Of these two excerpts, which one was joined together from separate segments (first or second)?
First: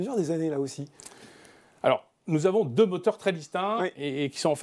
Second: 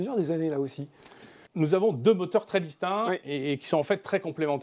second